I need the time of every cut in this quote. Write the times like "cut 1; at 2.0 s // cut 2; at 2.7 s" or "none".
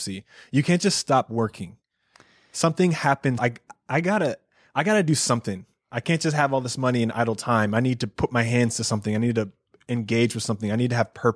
cut 1; at 3.4 s